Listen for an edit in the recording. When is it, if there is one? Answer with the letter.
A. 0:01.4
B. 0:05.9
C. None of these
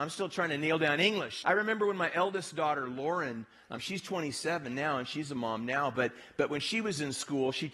A